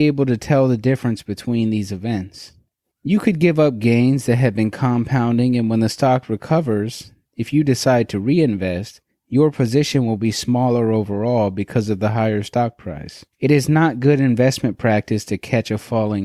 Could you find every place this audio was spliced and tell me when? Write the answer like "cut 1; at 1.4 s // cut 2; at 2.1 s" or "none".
cut 1; at 2.9 s // cut 2; at 13.3 s